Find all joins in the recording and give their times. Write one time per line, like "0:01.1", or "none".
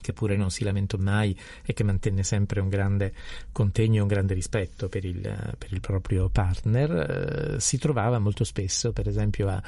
none